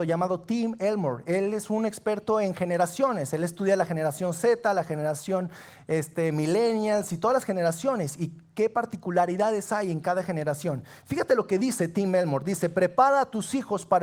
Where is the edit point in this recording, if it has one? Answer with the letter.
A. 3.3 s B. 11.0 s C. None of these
C